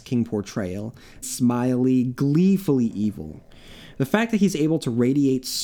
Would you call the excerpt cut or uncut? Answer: cut